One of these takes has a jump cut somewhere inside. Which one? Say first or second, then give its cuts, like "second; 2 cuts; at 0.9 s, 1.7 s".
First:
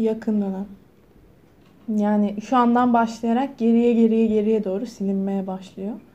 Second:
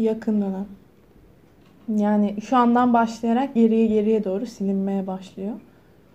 second; 1 cut; at 3.6 s